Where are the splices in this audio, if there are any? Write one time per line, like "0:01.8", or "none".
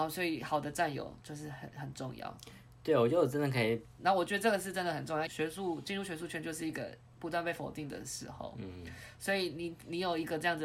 0:01.7
0:04.0
0:05.3